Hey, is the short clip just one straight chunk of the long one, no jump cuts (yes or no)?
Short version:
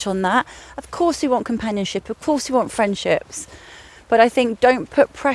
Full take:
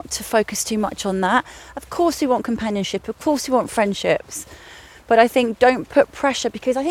yes